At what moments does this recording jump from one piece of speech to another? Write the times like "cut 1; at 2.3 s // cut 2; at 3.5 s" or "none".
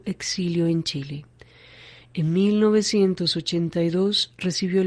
none